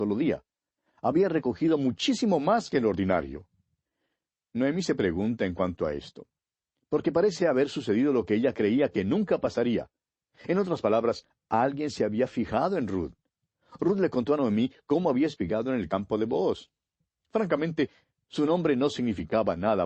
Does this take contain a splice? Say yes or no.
no